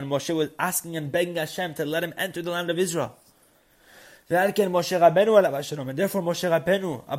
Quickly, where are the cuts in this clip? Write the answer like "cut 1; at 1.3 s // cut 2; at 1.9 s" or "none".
none